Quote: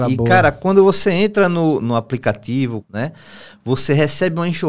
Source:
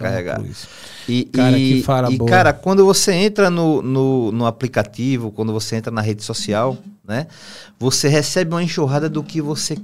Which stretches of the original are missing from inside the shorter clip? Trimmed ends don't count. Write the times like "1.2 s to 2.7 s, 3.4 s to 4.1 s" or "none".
3.8 s to 4.3 s, 5.3 s to 7.0 s